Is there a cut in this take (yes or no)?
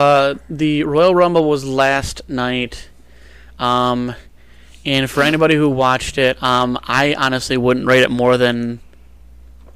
no